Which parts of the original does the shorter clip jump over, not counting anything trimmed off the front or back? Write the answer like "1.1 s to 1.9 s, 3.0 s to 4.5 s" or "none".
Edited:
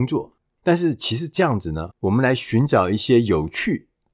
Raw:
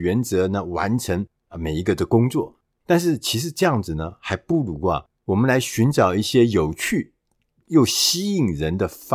4.1 s to 5.2 s